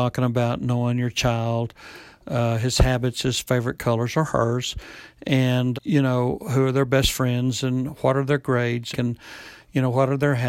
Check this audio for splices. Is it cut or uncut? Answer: cut